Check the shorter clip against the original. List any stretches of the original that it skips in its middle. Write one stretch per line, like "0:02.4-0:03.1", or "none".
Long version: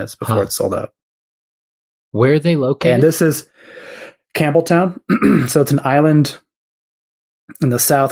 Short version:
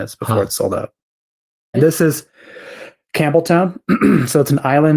0:01.7-0:02.9